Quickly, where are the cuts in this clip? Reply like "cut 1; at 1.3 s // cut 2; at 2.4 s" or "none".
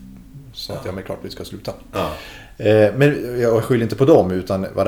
none